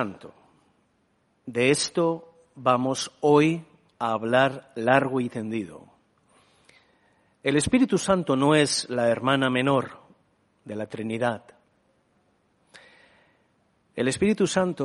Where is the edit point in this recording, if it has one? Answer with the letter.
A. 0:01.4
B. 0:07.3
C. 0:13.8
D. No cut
C